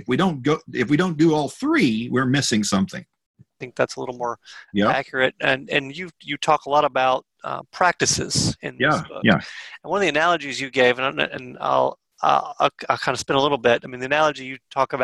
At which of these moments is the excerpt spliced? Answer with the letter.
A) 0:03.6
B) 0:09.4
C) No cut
A